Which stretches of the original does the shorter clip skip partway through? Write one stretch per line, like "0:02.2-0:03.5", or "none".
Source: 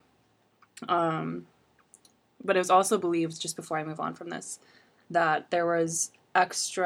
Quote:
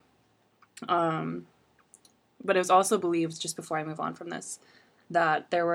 none